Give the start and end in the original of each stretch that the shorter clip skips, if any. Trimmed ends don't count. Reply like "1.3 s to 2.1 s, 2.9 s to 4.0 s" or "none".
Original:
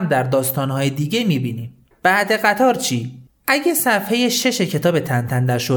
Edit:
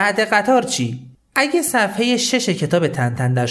none